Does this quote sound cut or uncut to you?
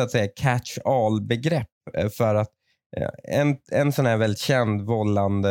uncut